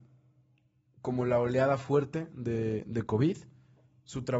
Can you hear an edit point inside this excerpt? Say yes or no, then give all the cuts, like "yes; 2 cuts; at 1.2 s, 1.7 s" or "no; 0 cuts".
no; 0 cuts